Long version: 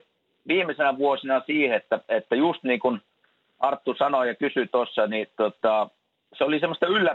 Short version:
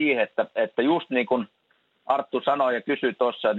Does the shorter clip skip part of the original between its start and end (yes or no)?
no